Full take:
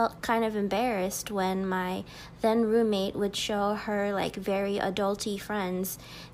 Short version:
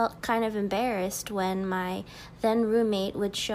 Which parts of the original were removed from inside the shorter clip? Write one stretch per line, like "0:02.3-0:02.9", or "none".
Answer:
none